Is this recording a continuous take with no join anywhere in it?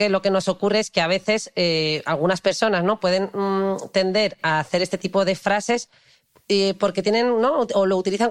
yes; 0 cuts

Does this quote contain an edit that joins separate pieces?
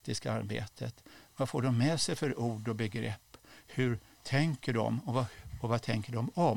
no; 0 cuts

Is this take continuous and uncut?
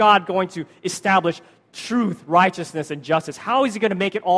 yes; 0 cuts

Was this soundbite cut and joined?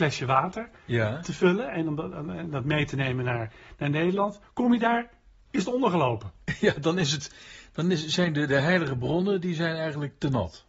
no; 0 cuts

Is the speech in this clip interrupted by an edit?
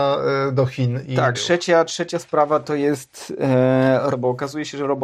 yes; 2 cuts; at 1.3 s, 4.1 s

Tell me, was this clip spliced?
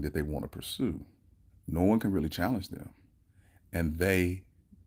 yes; 1 cut; at 1.5 s

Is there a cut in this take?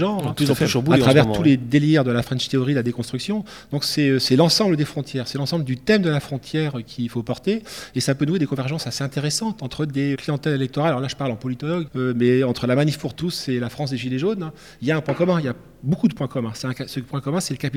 yes; 2 cuts; at 10.1 s, 11.9 s

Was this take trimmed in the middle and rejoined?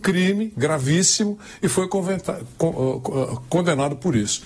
no; 0 cuts

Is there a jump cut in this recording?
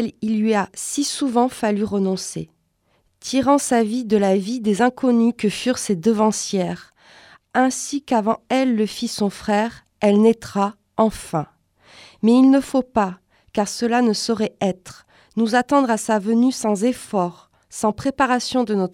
no; 0 cuts

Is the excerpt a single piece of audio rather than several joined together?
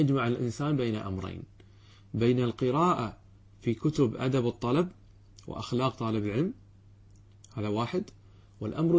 yes; 0 cuts

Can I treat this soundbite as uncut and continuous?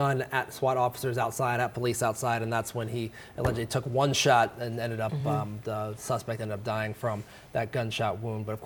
yes; 0 cuts

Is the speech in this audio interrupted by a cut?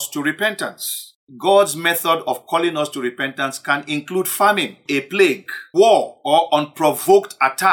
no; 0 cuts

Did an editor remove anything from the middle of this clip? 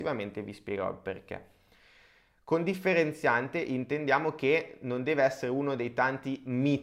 no; 0 cuts

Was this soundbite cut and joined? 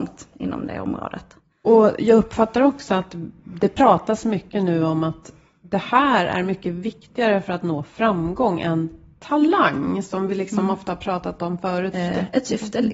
yes; 1 cut; at 11.9 s

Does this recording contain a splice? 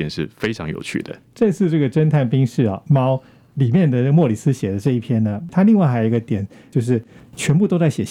no; 0 cuts

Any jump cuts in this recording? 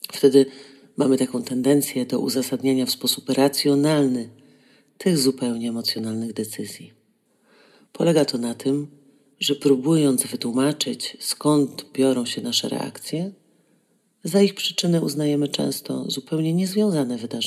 no; 0 cuts

